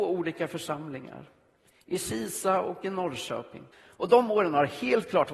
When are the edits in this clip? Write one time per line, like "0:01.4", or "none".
0:03.7